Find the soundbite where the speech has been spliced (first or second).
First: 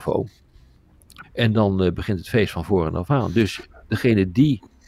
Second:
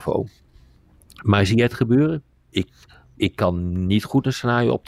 first